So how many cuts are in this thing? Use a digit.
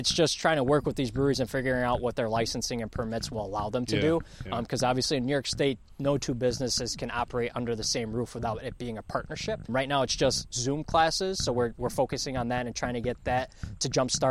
1